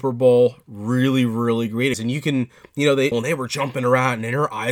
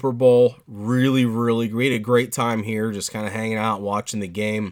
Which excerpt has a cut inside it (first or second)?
first